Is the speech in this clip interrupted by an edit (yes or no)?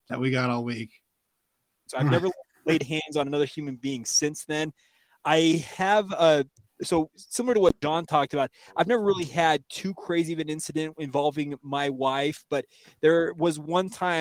yes